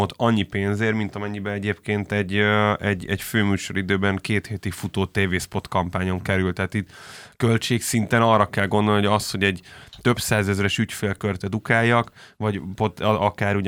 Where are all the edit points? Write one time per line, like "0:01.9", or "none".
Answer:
none